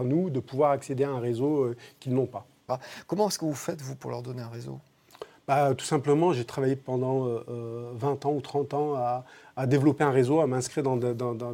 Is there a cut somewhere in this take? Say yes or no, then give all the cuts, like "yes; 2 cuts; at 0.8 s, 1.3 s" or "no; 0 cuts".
yes; 1 cut; at 2.7 s